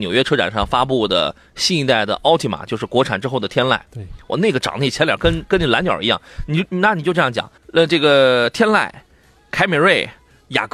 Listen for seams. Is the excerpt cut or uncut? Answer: cut